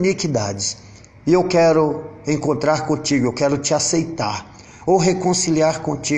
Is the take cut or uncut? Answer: uncut